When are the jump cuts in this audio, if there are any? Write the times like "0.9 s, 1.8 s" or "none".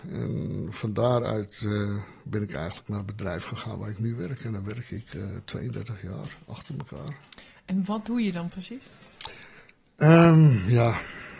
none

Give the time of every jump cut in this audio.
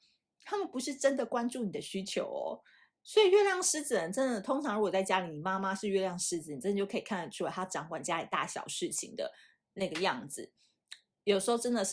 2.9 s

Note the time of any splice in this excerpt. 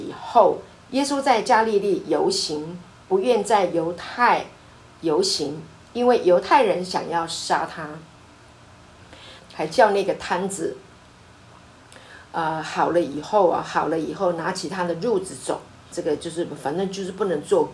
9.4 s, 15.9 s

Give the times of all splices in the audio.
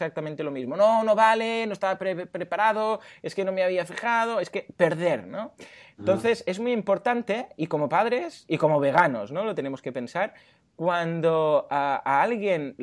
none

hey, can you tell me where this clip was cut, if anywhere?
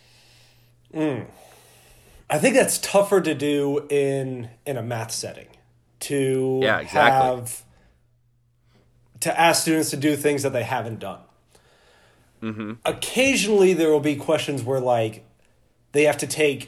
none

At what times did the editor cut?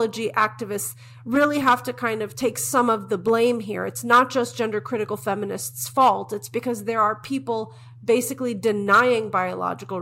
none

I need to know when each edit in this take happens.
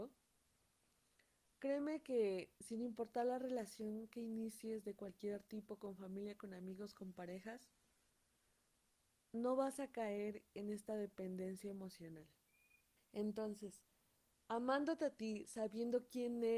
13.0 s

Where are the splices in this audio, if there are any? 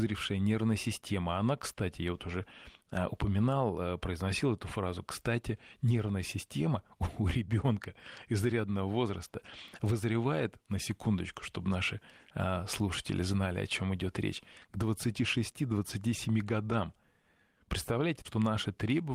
18.2 s

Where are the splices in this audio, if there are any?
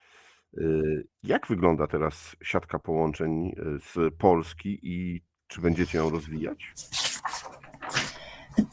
1.1 s

